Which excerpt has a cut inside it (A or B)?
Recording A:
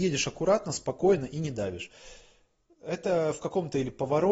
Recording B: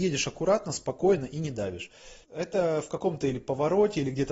B